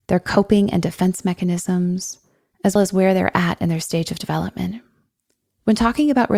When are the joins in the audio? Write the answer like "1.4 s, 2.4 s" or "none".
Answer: 2.8 s